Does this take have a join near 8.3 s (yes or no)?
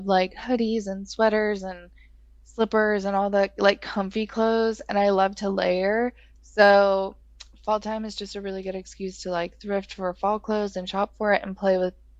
no